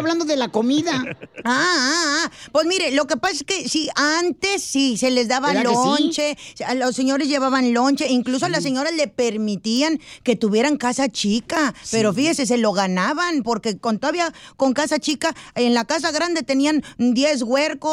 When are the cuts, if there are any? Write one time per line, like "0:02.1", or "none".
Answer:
none